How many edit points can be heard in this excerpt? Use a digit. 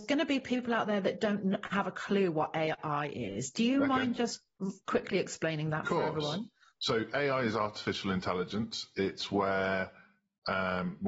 0